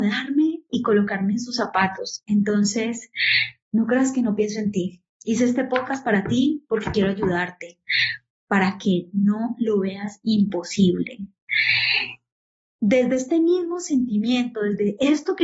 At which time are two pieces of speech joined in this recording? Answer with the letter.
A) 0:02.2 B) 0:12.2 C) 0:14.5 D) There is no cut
A